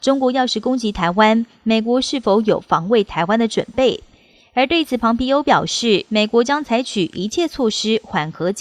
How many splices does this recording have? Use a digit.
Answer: 0